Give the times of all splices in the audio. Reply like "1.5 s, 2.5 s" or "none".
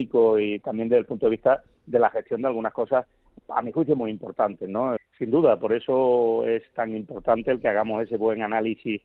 5.0 s